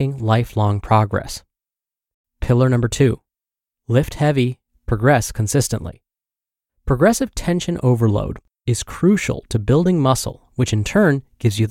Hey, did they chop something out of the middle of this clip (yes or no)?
no